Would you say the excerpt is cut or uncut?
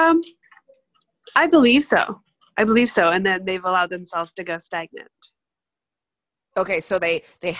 uncut